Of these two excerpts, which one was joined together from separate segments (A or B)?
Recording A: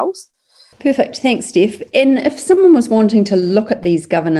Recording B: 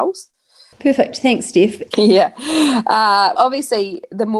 B